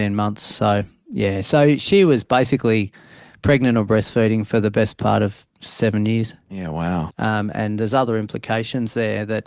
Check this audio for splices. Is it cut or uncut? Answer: cut